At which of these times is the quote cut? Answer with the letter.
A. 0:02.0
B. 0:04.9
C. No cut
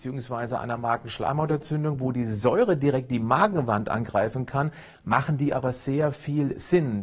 C